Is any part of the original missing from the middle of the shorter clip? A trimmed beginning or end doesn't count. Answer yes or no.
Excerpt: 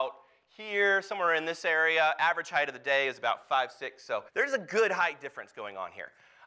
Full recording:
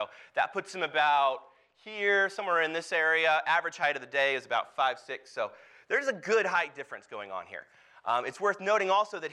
yes